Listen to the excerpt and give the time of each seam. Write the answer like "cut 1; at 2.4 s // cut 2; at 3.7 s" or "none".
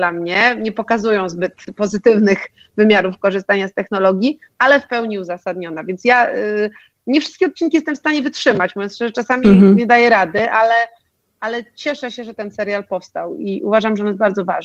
none